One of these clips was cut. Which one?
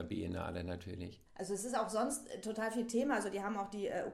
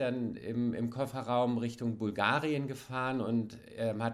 first; 1 cut; at 1.3 s

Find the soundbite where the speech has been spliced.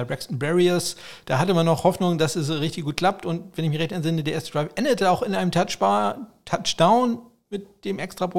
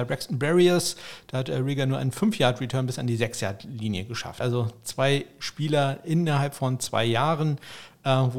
second; 2 cuts; at 1.2 s, 4.4 s

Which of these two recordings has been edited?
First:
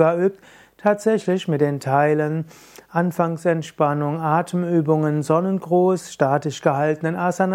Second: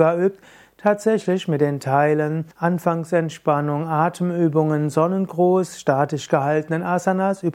second; 1 cut; at 2.5 s

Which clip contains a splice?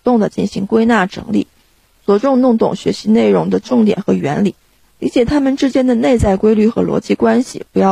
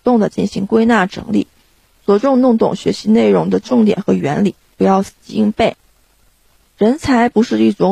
second; 2 cuts; at 4.7 s, 6.6 s

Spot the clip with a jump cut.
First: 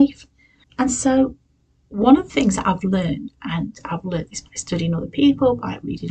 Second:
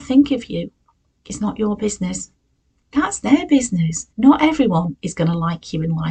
second; 2 cuts; at 2.8 s, 4.1 s

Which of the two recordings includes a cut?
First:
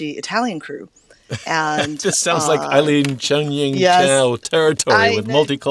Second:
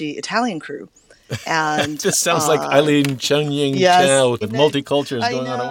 second; 1 cut; at 4.4 s

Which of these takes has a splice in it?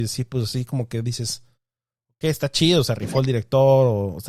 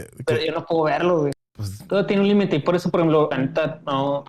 second; 2 cuts; at 1.3 s, 3.3 s

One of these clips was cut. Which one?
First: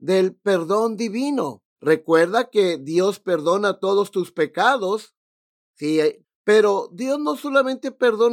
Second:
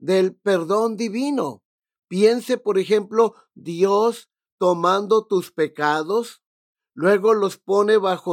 first; 2 cuts; at 1.8 s, 6.2 s

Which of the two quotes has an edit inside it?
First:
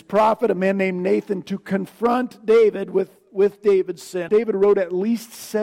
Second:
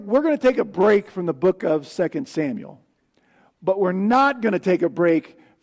first; 1 cut; at 4.3 s

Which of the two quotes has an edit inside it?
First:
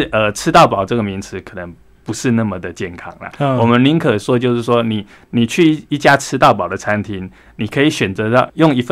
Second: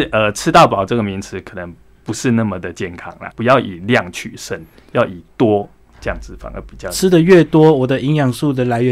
second; 1 cut; at 3.3 s

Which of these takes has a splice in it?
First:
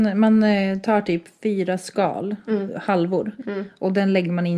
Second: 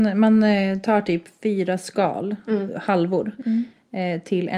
first; 1 cut; at 3.4 s

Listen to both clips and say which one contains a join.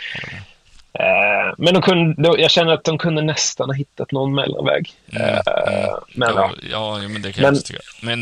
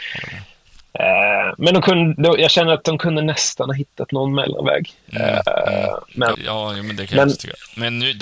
second; 1 cut; at 6.3 s

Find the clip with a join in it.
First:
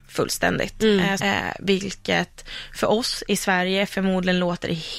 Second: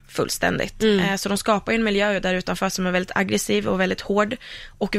first; 1 cut; at 1.2 s

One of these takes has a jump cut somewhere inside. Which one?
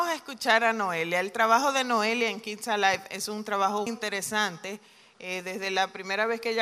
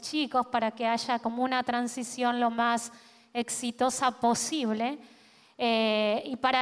first; 1 cut; at 3.9 s

